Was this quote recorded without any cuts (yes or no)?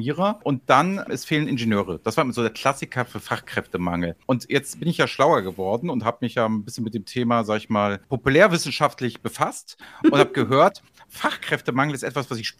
yes